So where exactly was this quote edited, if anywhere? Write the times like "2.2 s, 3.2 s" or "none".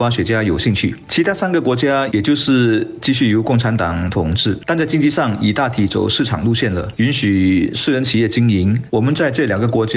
2.1 s, 8.9 s